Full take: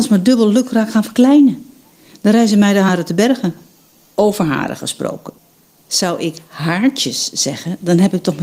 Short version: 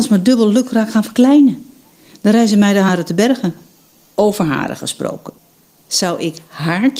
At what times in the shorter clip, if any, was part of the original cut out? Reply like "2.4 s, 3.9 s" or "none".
none